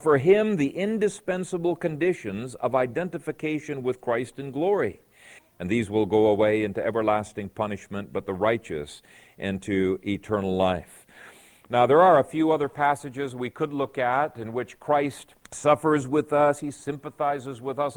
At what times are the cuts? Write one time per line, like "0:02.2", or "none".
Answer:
0:05.4
0:15.4
0:16.6